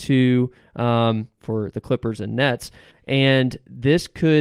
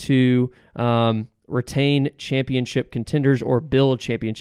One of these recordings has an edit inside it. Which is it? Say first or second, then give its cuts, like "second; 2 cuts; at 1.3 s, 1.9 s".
first; 2 cuts; at 1.4 s, 2.9 s